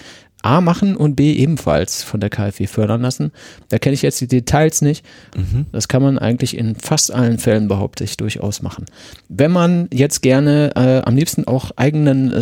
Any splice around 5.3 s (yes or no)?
yes